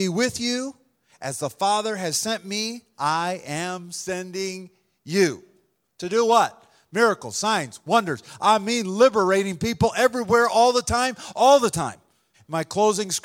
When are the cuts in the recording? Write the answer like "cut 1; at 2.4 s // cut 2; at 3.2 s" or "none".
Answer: cut 1; at 12.3 s